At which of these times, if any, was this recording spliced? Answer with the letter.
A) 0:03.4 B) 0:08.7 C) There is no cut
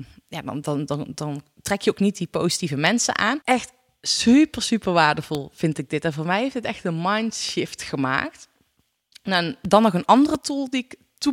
A